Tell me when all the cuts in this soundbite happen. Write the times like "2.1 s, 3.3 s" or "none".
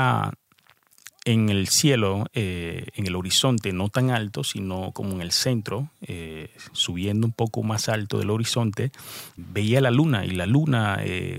9.4 s

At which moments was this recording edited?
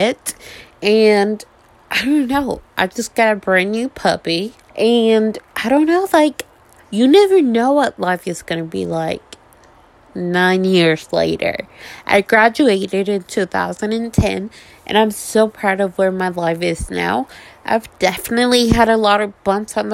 4.7 s

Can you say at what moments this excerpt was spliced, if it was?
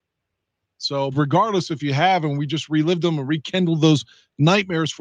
1.1 s

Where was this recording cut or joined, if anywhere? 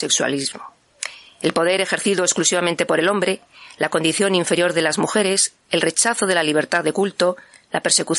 none

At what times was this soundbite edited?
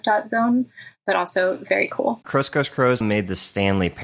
3.0 s

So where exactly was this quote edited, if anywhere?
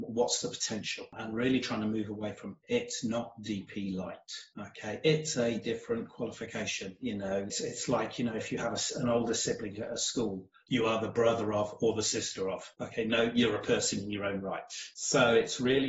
none

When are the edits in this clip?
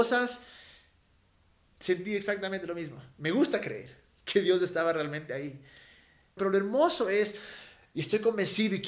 1.7 s, 6.4 s

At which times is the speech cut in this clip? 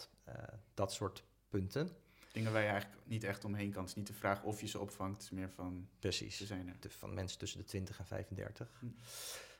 6.8 s

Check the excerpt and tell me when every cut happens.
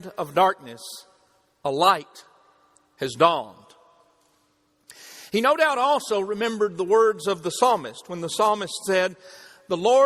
none

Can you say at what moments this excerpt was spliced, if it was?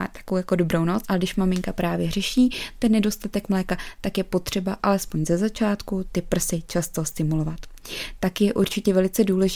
1.0 s

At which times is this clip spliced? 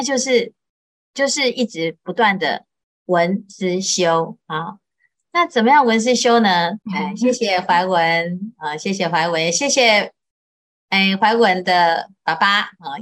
6.8 s

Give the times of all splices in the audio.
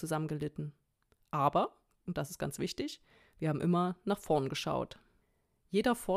none

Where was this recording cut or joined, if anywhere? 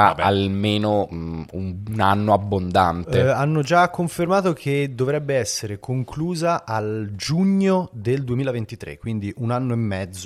none

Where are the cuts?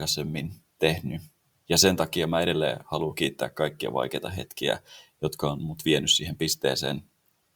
none

